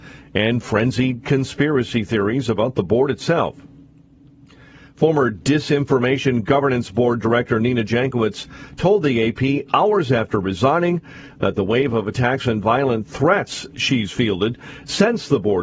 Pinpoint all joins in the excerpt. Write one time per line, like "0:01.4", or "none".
none